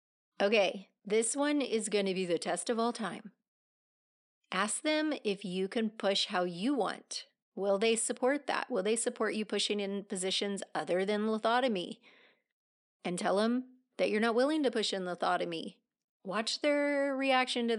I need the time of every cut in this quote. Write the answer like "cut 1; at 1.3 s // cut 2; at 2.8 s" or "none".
cut 1; at 13.9 s